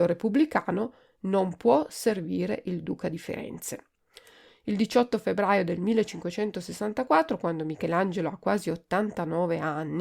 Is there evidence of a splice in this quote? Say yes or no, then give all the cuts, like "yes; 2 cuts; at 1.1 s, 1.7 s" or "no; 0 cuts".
no; 0 cuts